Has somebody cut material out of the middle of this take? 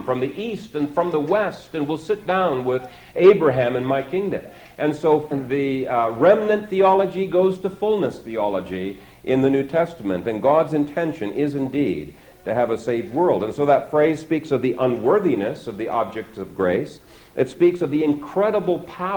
yes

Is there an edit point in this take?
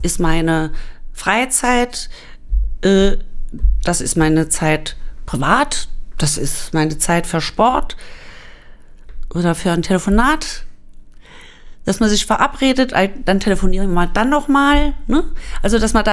no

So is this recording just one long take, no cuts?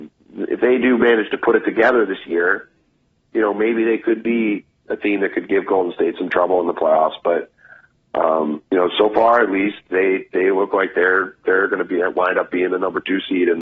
no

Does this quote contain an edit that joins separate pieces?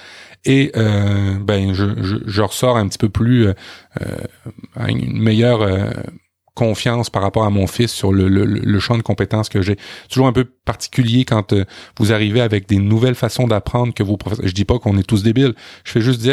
no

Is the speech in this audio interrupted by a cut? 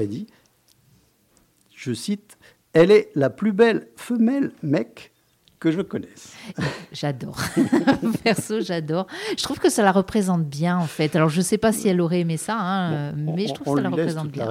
no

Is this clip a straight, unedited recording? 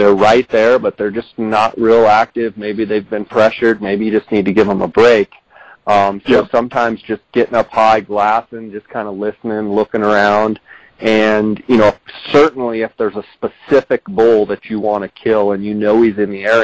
yes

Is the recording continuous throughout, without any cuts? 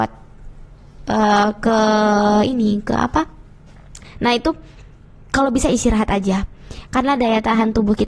no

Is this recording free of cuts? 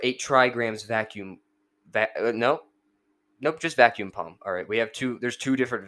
yes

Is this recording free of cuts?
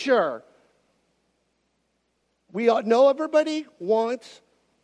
yes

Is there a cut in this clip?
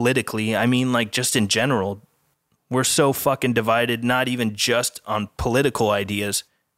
no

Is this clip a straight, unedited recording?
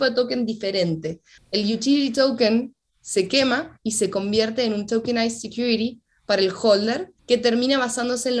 no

